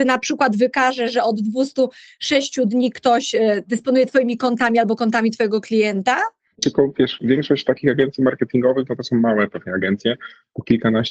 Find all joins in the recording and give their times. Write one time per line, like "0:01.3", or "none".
0:06.5